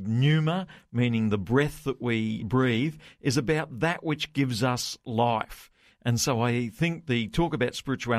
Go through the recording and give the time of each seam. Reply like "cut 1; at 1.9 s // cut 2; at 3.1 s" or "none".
cut 1; at 2.4 s